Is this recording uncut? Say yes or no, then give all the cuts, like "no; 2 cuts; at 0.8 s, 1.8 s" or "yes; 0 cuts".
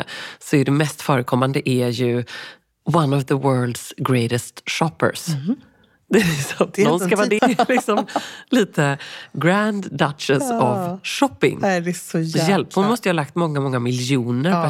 no; 1 cut; at 7.4 s